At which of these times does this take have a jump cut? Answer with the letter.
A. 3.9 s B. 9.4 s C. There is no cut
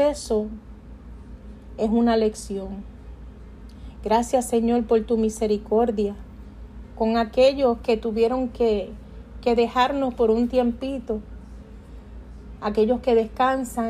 C